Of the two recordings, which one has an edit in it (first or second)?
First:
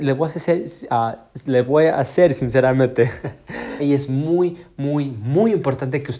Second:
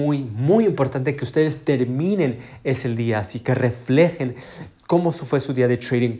first